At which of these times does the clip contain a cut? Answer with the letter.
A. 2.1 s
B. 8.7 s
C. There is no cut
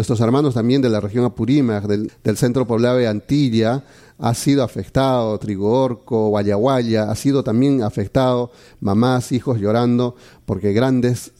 A